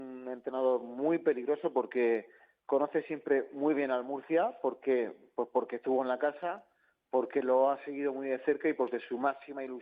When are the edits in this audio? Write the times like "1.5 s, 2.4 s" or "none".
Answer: none